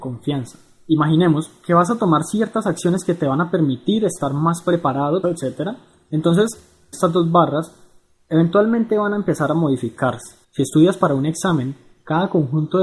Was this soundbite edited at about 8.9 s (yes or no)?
no